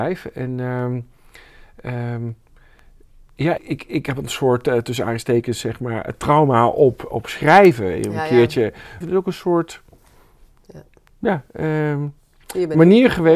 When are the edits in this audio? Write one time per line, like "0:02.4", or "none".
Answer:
0:03.6
0:09.0